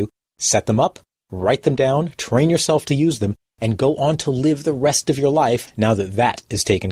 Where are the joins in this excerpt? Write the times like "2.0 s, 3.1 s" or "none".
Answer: none